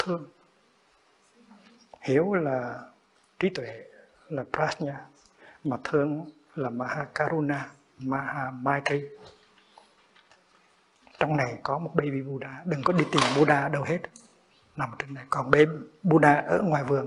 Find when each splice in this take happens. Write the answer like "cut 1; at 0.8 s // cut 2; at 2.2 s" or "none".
none